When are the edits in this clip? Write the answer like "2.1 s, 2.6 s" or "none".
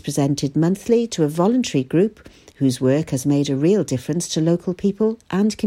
none